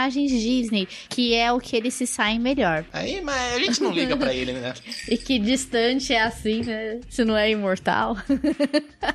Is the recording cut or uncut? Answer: cut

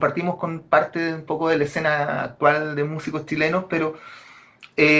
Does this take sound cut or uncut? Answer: uncut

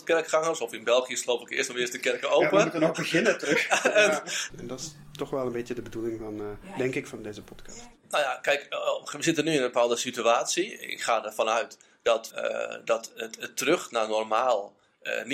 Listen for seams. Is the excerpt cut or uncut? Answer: cut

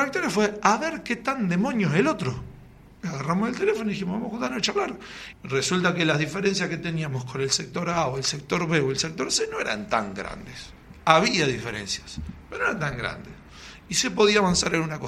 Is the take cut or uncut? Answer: cut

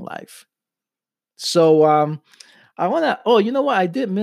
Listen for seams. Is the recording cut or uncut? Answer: uncut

